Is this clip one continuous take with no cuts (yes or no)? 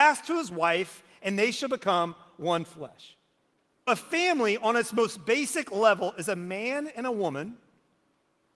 no